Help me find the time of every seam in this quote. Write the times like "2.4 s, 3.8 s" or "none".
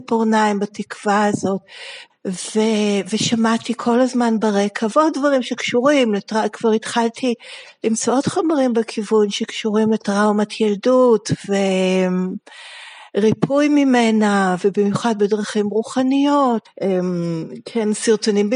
2.1 s, 16.6 s